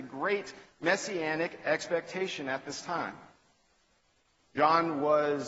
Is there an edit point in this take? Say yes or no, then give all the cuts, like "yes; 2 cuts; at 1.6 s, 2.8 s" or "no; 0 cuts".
yes; 1 cut; at 4.4 s